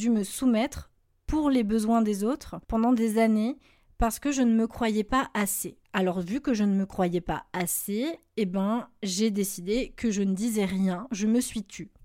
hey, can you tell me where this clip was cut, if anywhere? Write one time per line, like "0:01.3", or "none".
0:02.6
0:05.8